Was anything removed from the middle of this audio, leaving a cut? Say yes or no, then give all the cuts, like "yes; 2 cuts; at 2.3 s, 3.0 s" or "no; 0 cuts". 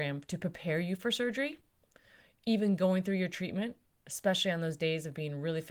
no; 0 cuts